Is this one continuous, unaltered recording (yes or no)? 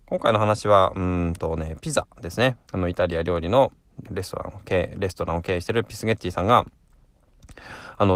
no